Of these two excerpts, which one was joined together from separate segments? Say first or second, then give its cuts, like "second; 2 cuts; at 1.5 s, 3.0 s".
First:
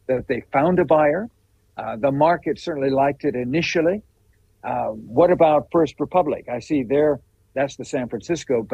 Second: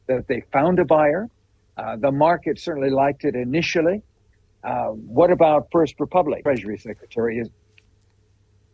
second; 1 cut; at 6.5 s